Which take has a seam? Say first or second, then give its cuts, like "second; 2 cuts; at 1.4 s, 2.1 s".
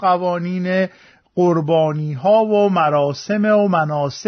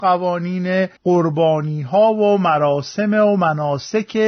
second; 1 cut; at 1.0 s